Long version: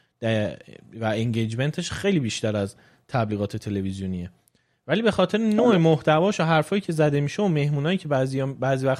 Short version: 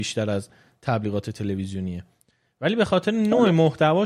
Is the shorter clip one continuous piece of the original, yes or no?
yes